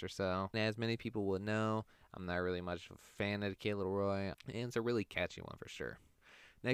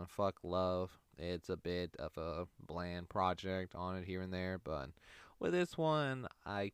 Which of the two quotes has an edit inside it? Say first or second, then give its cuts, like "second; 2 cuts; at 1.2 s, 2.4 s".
first; 1 cut; at 4.3 s